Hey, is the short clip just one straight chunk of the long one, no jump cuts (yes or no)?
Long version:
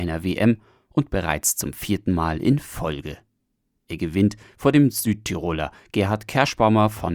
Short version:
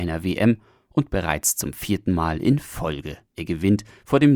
no